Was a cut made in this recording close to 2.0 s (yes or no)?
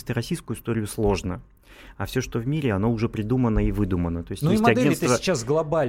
no